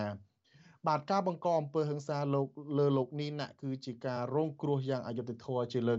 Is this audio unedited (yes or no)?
yes